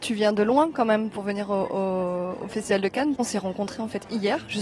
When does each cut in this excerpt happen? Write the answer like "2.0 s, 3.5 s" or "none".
3.2 s